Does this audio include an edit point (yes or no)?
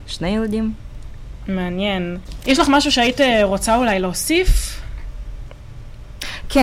no